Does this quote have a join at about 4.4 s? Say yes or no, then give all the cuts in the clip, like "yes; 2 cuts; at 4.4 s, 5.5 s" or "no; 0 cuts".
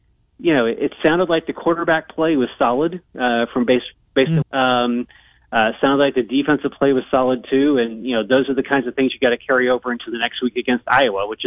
yes; 1 cut; at 4.4 s